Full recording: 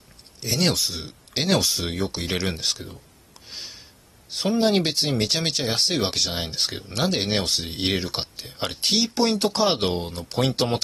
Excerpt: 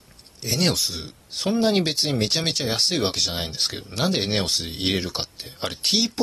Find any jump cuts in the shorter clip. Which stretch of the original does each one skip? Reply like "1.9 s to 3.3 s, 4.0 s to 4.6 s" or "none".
1.2 s to 4.2 s